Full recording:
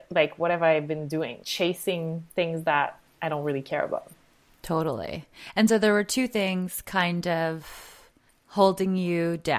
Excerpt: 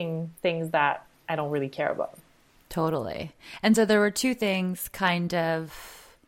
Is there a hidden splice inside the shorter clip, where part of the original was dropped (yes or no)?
no